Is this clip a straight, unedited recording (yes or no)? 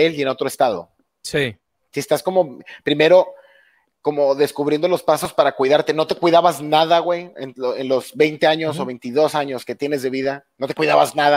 yes